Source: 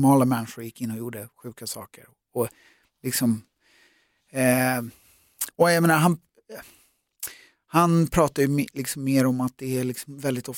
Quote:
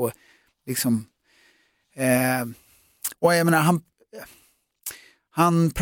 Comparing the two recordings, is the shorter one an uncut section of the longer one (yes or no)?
yes